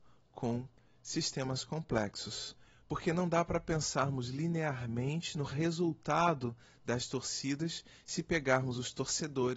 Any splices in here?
yes; 1 cut; at 2.7 s

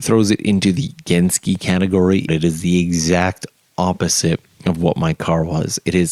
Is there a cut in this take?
yes; 1 cut; at 2.3 s

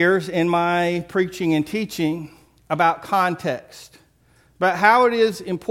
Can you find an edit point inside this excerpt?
no; 0 cuts

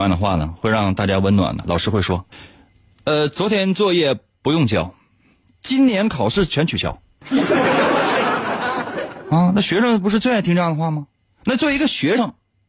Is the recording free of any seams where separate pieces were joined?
yes; 0 cuts

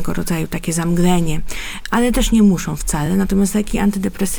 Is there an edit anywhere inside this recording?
no; 0 cuts

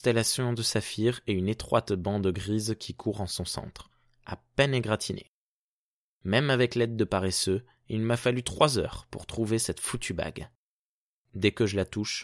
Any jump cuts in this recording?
no; 0 cuts

